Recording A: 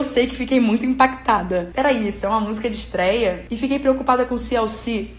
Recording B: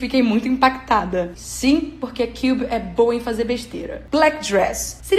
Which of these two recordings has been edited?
B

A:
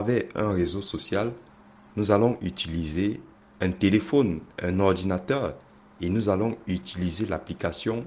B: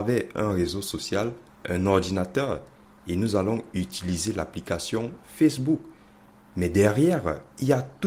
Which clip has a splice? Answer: B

